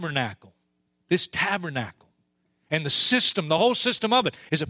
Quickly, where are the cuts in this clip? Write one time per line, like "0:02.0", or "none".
none